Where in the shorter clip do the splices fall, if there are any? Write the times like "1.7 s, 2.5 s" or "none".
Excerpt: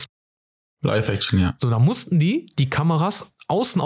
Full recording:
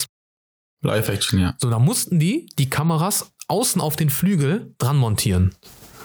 none